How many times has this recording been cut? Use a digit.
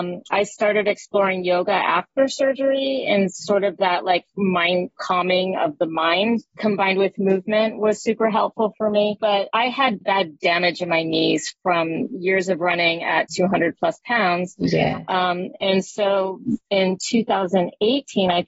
1